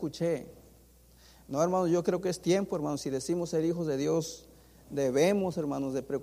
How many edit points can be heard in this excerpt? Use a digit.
0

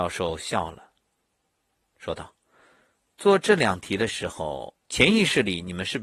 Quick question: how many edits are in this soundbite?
1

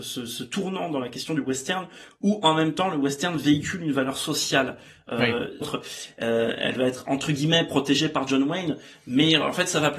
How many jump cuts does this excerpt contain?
1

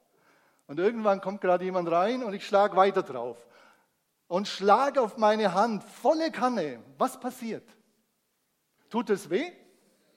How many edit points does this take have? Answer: 1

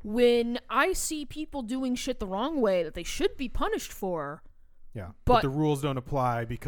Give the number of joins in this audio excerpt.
0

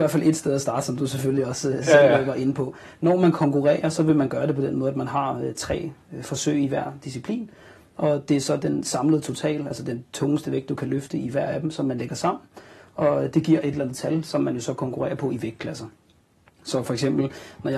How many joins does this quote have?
0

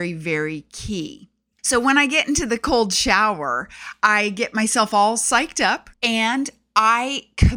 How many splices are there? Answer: 1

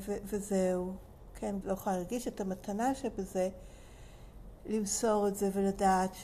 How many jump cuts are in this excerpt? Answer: 1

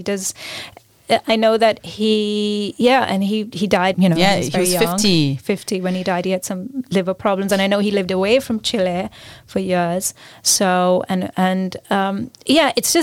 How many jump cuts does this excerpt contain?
1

